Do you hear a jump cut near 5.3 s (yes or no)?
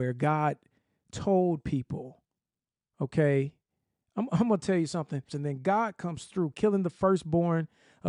yes